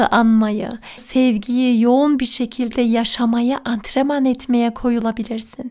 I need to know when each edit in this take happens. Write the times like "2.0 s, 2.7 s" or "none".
1.0 s